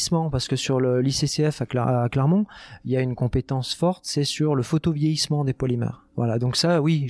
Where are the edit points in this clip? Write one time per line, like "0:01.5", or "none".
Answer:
none